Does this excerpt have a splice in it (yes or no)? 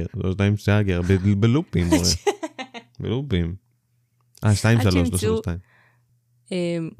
no